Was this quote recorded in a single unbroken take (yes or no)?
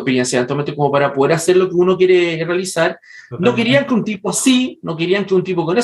yes